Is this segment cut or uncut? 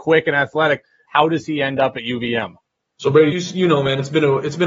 cut